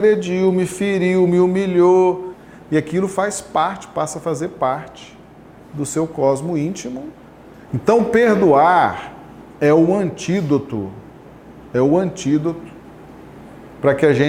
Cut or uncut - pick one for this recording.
cut